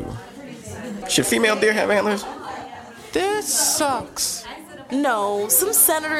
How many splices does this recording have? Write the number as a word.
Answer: two